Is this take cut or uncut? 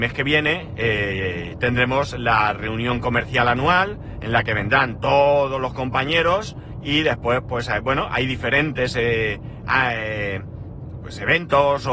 uncut